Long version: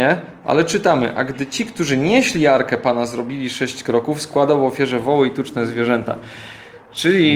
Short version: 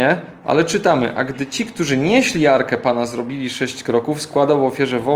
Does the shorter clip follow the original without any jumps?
yes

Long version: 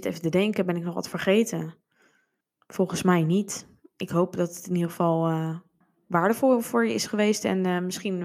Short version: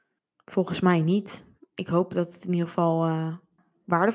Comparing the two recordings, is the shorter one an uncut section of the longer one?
yes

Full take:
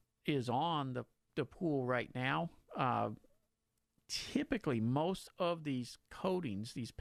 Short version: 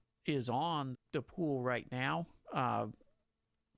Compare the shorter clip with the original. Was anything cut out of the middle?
yes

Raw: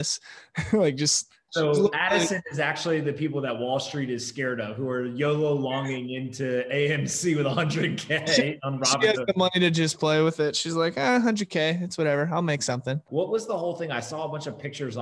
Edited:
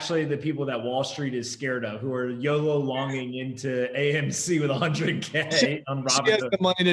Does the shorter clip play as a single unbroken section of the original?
yes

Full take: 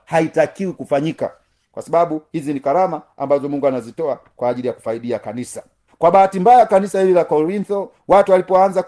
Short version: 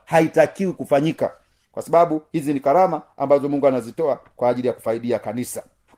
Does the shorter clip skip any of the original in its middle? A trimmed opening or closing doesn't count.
no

